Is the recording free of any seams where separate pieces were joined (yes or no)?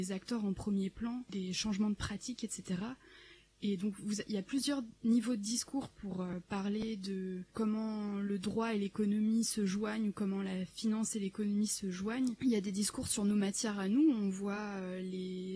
yes